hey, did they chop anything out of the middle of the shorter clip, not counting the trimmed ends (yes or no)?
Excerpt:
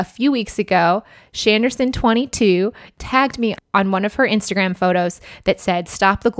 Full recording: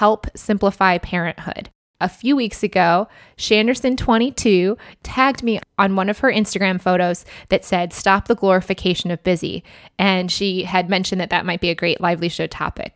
no